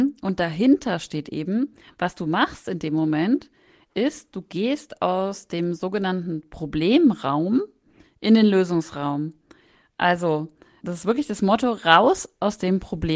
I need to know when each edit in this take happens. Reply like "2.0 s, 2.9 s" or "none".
none